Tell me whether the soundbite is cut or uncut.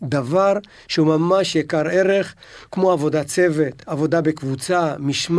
uncut